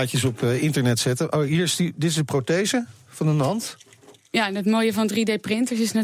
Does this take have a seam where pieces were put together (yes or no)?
no